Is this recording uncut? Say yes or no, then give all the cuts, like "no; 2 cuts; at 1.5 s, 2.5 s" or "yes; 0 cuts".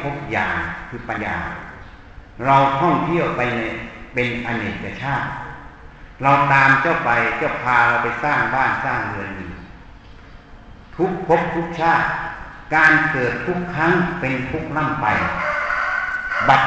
no; 1 cut; at 1.2 s